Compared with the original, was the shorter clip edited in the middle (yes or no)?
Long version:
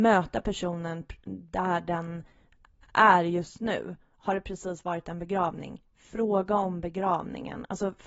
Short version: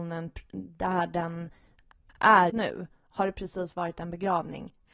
yes